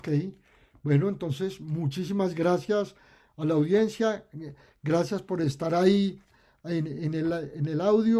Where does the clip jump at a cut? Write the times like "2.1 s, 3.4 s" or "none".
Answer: none